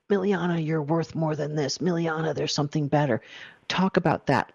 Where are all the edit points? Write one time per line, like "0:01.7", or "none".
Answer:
none